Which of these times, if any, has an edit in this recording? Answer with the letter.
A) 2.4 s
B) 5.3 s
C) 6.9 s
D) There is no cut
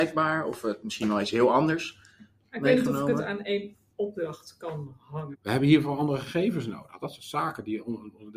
B